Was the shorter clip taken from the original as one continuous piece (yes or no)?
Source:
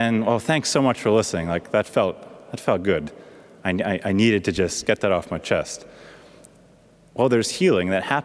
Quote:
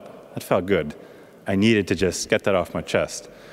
no